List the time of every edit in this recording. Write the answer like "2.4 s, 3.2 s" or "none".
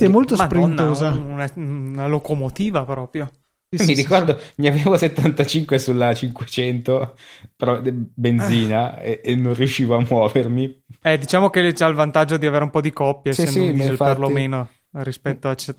none